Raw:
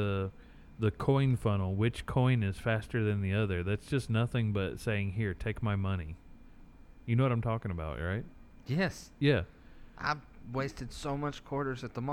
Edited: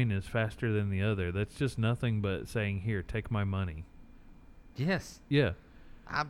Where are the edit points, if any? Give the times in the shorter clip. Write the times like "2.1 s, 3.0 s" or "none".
4.7 s